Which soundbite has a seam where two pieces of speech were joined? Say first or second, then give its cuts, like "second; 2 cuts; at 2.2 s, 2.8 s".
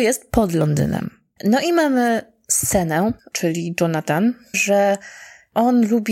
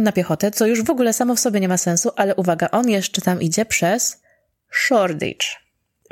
first; 3 cuts; at 1.4 s, 3.2 s, 4.5 s